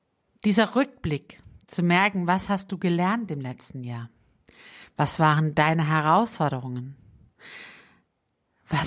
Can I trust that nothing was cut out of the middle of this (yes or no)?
yes